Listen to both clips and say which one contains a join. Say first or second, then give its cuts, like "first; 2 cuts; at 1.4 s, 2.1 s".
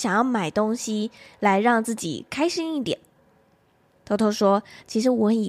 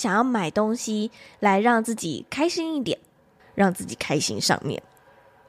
second; 1 cut; at 3.4 s